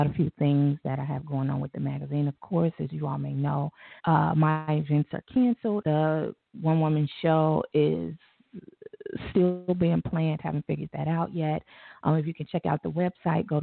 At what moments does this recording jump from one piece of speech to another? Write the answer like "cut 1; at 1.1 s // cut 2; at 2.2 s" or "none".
cut 1; at 4.0 s // cut 2; at 5.8 s